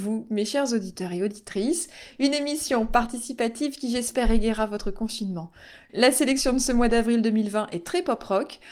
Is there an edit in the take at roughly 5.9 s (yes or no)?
yes